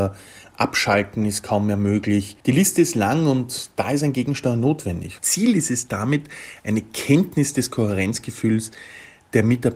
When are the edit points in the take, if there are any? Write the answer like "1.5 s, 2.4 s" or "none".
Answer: 2.4 s, 5.2 s